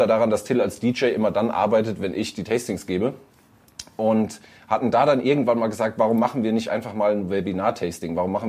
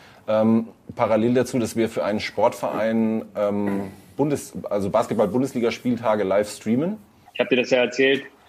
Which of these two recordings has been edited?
second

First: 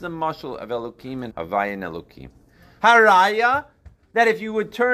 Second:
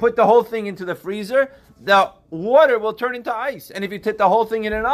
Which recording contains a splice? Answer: first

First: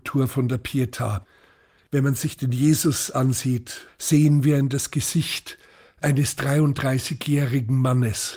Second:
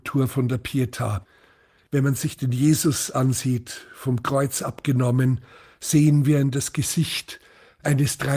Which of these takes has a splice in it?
first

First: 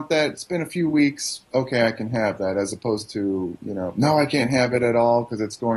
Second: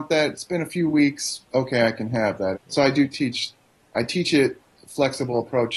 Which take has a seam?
second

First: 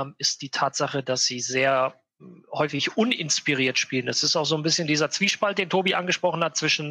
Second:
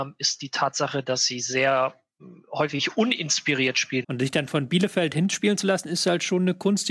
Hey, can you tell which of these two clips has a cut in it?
second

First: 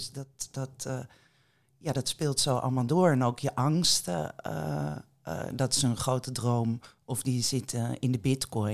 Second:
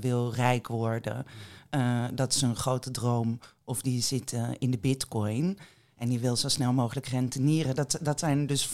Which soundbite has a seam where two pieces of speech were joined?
first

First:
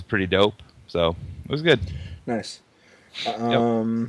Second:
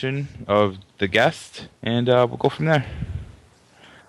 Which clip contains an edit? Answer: second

